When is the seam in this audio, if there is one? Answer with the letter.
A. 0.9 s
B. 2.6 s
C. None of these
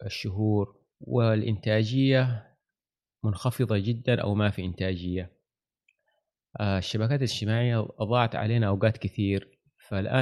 A